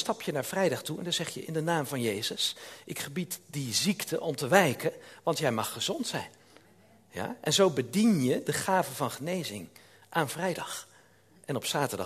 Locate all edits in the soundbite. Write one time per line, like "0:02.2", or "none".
none